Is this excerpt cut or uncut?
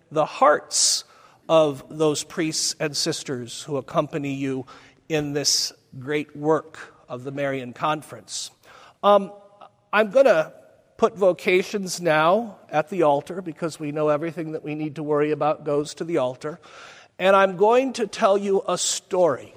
uncut